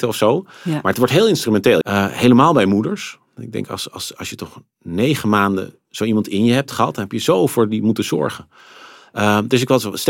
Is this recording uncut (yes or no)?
no